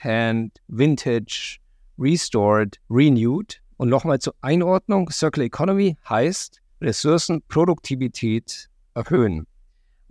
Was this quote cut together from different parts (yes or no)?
yes